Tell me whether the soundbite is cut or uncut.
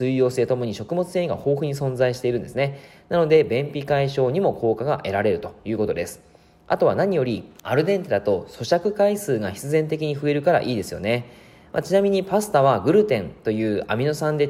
uncut